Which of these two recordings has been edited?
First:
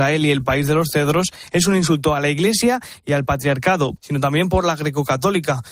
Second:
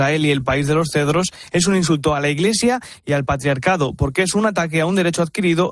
first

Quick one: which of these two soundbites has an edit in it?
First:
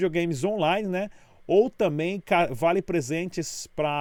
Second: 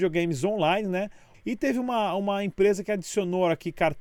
second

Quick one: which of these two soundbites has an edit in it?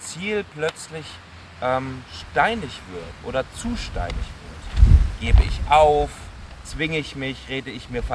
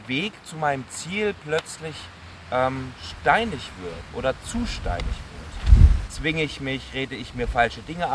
second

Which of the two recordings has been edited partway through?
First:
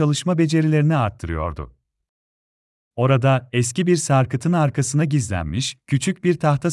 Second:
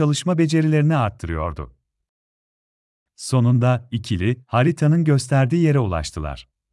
first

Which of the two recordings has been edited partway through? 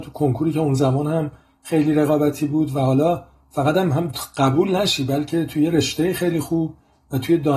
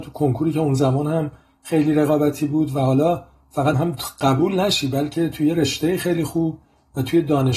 second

